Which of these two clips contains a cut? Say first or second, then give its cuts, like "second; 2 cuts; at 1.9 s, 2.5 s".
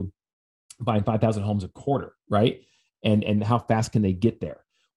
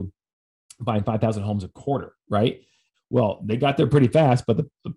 second; 1 cut; at 2.9 s